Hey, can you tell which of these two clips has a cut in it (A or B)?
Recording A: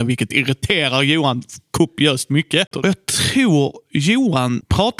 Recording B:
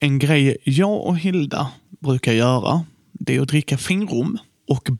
A